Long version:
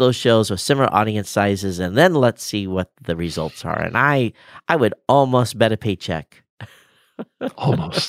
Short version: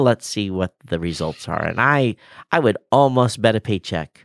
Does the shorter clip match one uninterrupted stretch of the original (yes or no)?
yes